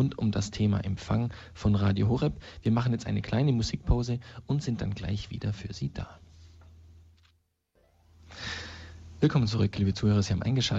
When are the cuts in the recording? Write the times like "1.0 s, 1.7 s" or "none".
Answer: none